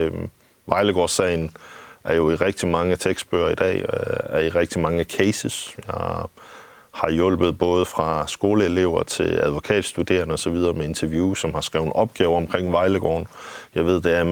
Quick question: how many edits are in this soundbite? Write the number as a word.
zero